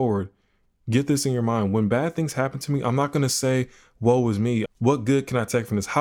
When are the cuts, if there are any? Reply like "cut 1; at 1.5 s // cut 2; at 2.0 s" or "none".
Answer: cut 1; at 4.7 s